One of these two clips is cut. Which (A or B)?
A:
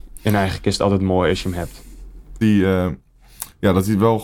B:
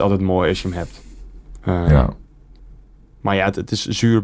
A